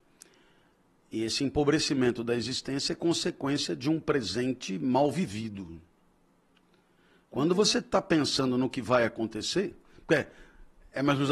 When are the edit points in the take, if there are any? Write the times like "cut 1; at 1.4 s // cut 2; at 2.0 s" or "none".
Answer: none